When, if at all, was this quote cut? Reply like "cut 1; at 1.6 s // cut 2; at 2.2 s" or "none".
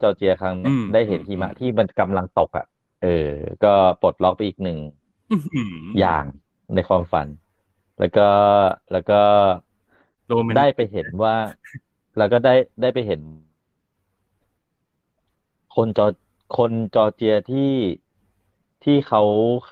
none